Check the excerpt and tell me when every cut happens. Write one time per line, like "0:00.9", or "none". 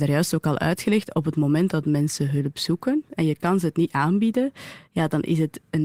none